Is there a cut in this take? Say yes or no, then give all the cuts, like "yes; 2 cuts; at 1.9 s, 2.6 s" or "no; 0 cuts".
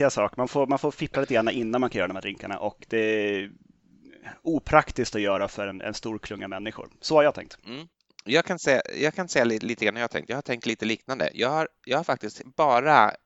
no; 0 cuts